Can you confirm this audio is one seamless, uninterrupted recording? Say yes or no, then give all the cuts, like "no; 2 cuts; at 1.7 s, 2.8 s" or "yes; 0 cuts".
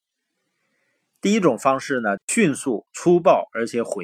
no; 1 cut; at 2.2 s